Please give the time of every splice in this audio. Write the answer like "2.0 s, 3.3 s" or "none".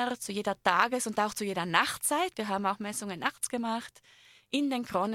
none